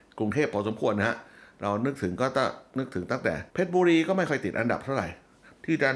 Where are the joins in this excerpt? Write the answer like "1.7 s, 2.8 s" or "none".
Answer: 3.5 s